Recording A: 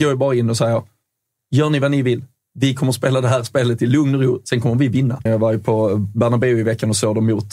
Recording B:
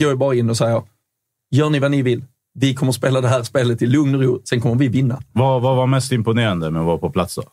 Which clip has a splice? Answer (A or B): A